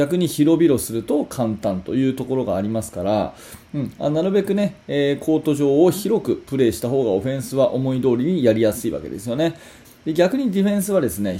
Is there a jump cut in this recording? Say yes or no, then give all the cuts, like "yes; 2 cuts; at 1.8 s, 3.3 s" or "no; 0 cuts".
yes; 1 cut; at 9.8 s